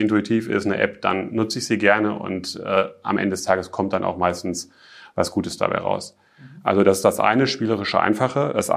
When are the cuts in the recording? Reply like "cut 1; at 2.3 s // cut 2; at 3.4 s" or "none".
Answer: none